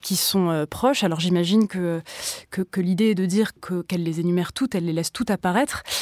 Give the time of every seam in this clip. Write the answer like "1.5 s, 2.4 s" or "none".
3.6 s